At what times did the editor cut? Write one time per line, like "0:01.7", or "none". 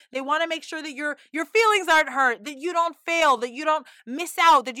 none